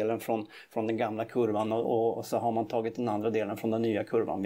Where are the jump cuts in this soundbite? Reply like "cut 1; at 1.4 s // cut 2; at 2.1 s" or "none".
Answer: none